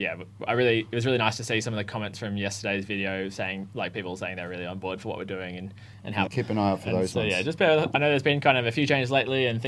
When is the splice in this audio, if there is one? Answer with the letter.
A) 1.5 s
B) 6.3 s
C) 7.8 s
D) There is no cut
B